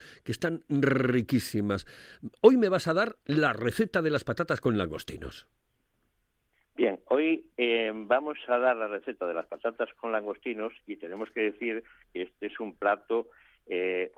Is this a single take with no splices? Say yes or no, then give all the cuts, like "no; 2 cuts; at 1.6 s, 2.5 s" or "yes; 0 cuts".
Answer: yes; 0 cuts